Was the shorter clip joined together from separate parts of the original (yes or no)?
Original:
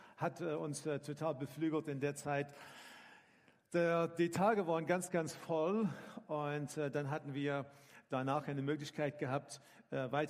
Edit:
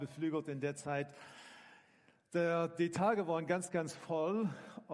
no